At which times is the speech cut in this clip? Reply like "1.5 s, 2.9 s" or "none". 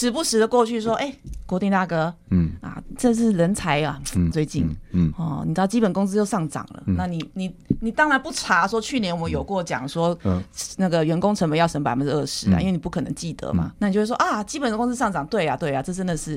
4.3 s, 13.8 s